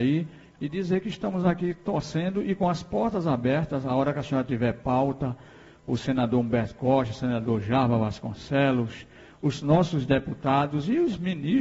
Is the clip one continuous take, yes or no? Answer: yes